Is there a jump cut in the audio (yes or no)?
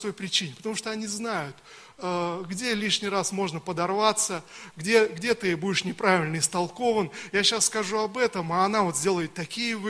no